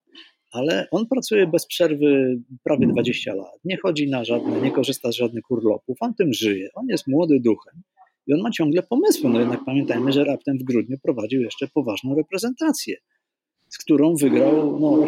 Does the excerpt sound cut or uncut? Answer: uncut